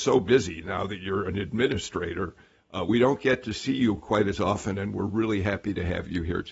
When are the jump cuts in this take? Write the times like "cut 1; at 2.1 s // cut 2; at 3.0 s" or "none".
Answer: none